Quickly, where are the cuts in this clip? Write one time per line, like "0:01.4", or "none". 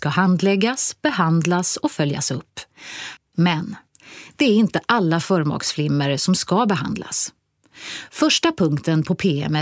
0:03.2